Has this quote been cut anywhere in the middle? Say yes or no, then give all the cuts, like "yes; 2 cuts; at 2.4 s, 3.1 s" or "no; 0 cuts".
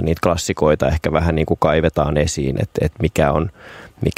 no; 0 cuts